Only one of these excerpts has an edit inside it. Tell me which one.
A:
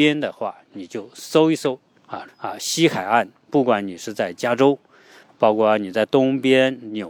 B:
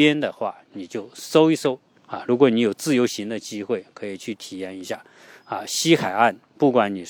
A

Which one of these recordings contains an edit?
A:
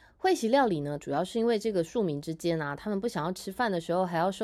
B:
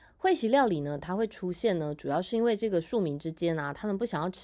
A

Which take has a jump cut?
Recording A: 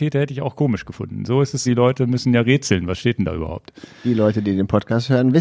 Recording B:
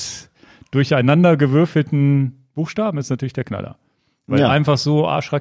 A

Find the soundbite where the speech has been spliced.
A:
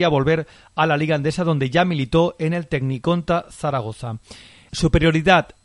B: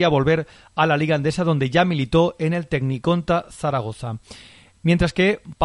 A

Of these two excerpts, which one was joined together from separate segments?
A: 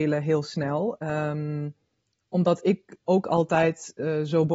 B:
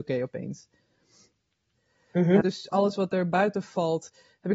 B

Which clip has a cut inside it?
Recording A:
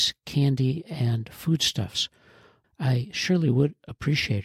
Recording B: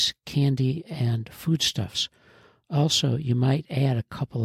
A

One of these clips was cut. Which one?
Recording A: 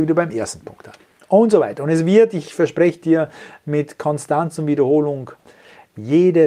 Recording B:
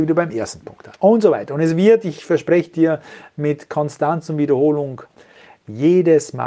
B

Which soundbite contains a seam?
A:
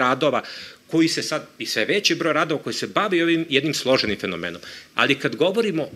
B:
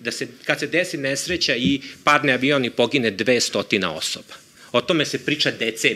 A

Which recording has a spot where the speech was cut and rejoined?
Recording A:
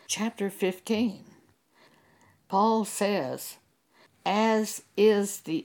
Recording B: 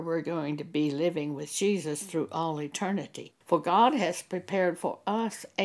B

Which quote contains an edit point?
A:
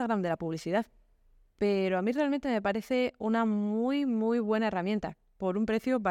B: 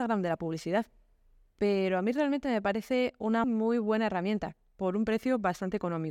B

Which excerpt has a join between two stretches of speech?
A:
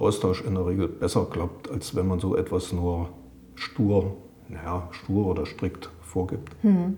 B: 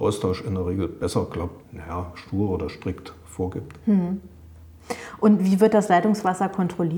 B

